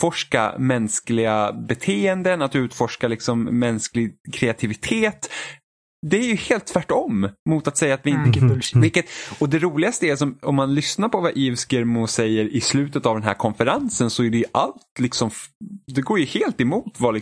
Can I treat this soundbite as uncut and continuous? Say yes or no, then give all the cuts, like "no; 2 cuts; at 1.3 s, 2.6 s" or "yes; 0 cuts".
no; 1 cut; at 8.2 s